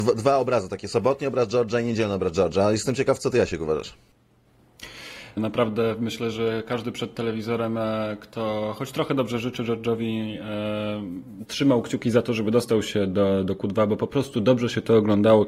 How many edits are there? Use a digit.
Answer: 1